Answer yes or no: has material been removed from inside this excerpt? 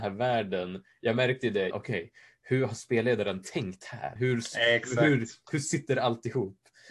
yes